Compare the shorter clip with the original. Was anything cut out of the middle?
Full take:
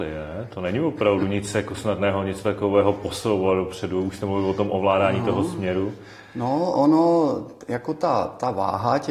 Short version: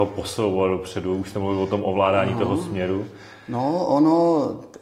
no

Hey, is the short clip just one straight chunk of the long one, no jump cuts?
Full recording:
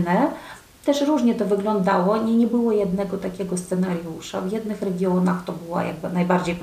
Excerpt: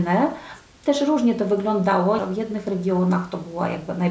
no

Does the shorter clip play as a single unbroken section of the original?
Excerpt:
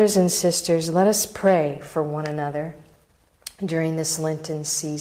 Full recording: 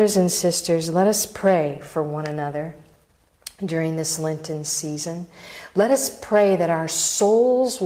yes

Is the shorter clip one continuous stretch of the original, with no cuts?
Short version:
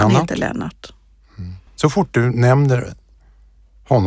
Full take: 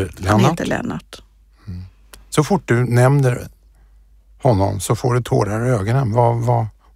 no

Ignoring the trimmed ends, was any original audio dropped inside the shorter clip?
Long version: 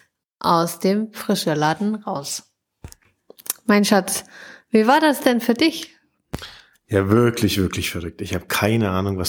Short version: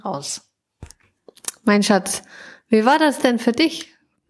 no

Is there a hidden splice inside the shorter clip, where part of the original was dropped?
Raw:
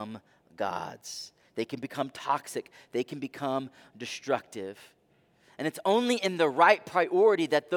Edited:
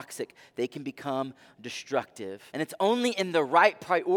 yes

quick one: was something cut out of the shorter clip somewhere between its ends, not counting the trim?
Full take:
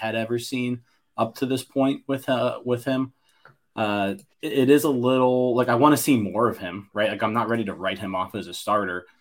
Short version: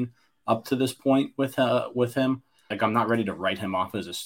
yes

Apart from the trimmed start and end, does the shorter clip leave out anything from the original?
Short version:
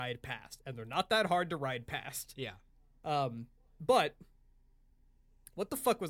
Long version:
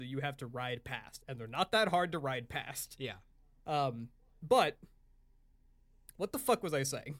no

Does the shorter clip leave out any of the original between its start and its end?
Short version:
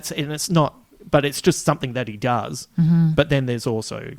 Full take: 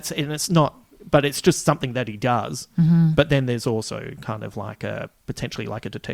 no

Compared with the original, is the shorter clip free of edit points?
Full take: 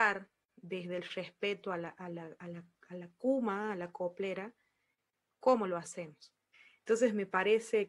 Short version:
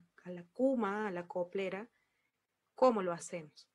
yes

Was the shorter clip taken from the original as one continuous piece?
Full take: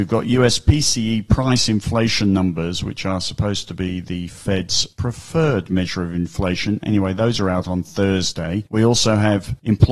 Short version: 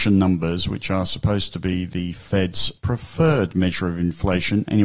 yes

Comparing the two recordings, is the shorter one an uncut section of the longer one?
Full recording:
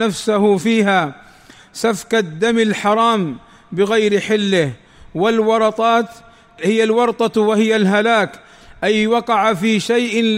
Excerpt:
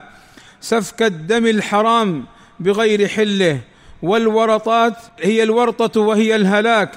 no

